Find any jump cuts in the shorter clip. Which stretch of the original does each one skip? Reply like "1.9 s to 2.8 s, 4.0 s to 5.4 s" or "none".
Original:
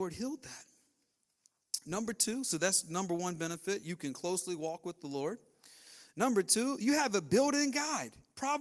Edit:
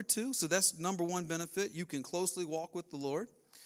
none